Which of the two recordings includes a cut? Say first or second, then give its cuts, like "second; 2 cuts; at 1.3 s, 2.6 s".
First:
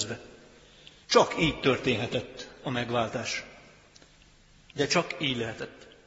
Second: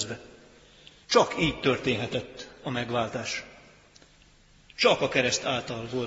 first; 1 cut; at 4.7 s